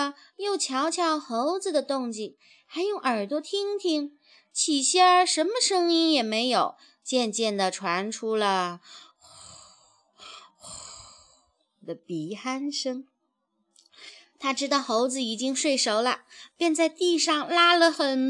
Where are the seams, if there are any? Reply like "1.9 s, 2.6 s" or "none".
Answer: none

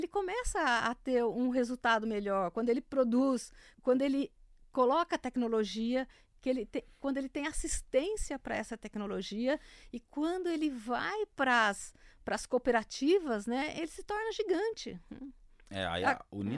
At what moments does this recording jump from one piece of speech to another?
3.7 s

